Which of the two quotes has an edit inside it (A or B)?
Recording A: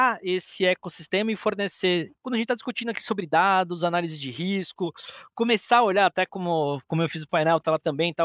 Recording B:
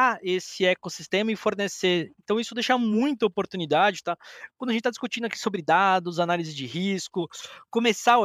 A